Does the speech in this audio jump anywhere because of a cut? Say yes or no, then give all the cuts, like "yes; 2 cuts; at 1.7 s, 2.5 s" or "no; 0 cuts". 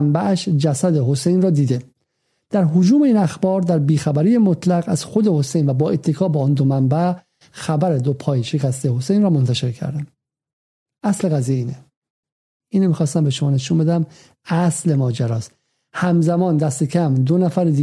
yes; 1 cut; at 12.6 s